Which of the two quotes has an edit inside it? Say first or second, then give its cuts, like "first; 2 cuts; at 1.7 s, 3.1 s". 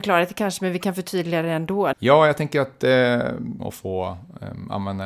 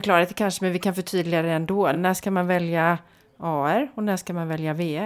first; 2 cuts; at 1.9 s, 3.6 s